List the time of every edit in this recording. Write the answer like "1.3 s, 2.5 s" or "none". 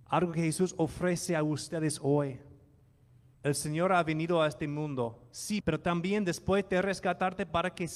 3.3 s, 5.6 s